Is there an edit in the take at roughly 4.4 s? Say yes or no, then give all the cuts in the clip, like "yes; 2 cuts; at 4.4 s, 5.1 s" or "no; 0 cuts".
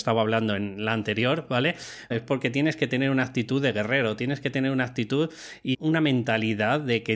no; 2 cuts; at 2.1 s, 5.7 s